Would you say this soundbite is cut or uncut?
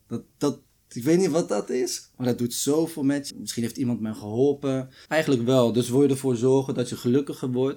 cut